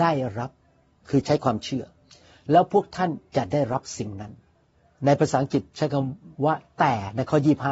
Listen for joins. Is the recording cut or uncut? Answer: cut